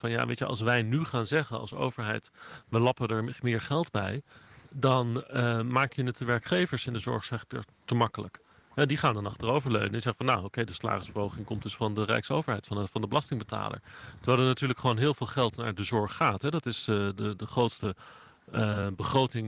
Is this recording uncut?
yes; 0 cuts

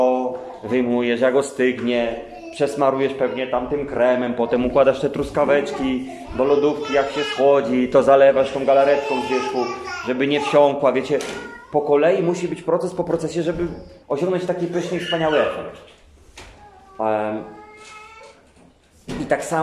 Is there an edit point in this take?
yes; 1 cut; at 14.0 s

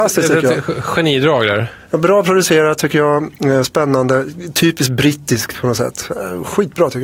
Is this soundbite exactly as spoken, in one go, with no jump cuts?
yes; 0 cuts

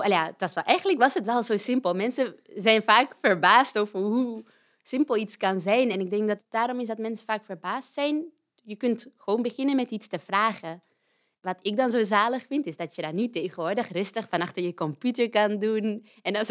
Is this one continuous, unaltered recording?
yes; 0 cuts

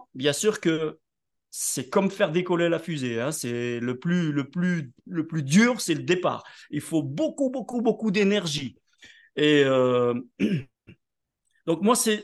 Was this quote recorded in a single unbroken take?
yes; 0 cuts

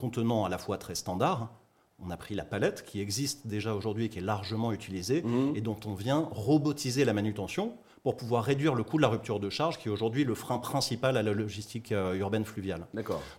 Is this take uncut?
yes; 0 cuts

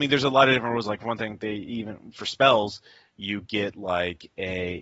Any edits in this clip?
no; 0 cuts

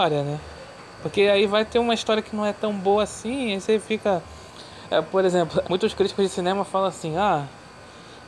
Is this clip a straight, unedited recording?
no; 1 cut; at 5.6 s

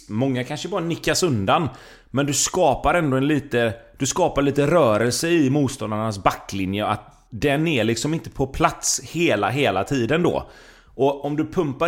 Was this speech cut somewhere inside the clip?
no; 0 cuts

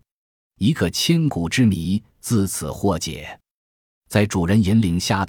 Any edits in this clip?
yes; 1 cut; at 3.9 s

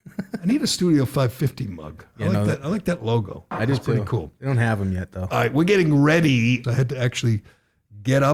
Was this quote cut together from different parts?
yes; 1 cut; at 6.6 s

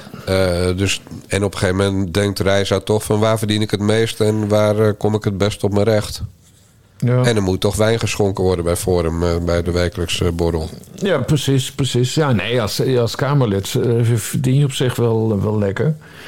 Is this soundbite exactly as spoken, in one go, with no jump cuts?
yes; 0 cuts

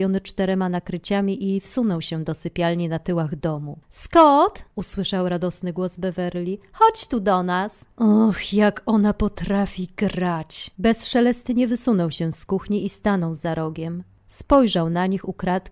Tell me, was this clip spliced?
yes; 1 cut; at 10.7 s

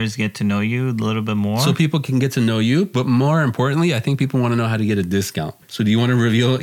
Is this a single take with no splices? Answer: no; 1 cut; at 5.6 s

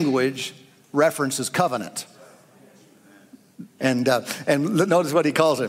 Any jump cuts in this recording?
yes; 1 cut; at 3.8 s

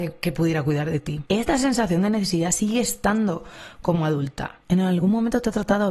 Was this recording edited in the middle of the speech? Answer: yes; 1 cut; at 4.6 s

